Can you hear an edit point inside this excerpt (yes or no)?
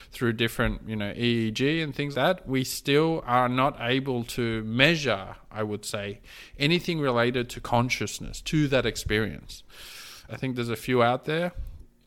yes